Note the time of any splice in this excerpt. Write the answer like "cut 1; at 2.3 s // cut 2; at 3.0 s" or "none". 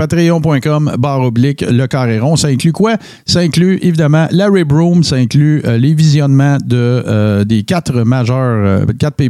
none